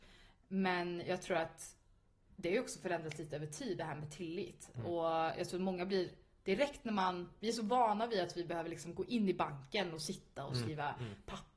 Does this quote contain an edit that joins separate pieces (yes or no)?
no